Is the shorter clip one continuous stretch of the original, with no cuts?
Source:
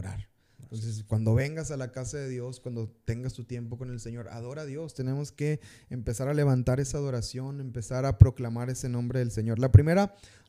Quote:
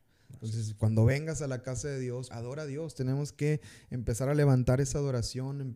no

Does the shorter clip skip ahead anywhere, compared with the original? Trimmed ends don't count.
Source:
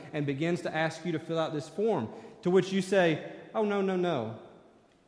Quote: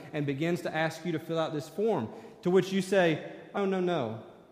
yes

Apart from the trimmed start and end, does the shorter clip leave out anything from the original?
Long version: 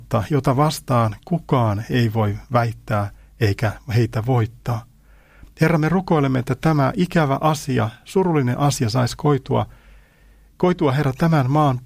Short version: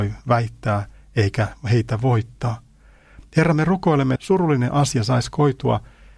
yes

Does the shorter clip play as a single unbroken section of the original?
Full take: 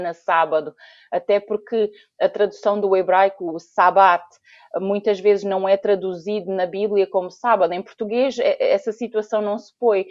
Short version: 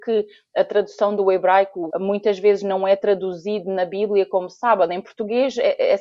no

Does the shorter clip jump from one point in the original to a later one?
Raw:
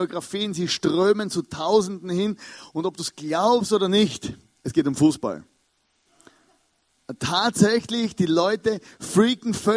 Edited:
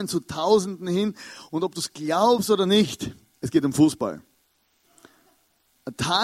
no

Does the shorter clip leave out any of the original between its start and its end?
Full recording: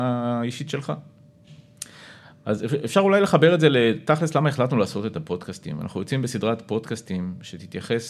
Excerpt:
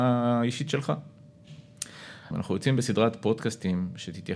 yes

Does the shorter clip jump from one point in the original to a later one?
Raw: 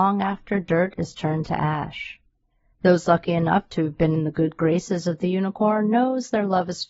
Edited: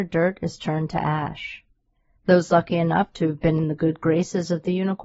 no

